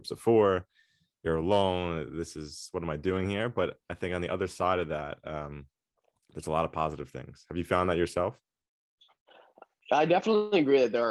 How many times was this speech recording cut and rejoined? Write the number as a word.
zero